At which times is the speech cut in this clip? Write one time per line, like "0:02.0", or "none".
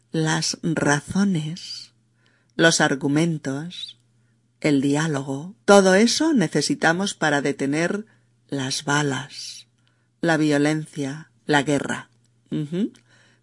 0:05.6
0:11.4